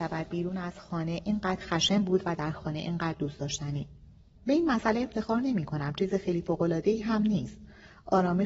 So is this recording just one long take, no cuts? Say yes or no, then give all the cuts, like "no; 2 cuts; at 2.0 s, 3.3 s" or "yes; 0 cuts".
no; 1 cut; at 4.4 s